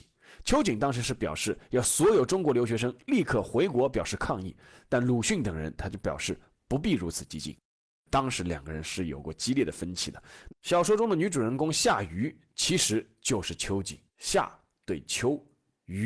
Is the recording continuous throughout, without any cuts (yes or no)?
no